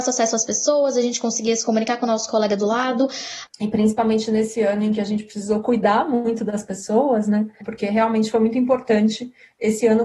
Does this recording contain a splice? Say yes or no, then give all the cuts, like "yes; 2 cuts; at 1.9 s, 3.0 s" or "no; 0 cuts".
yes; 2 cuts; at 3.5 s, 7.6 s